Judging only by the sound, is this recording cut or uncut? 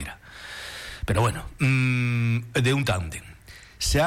uncut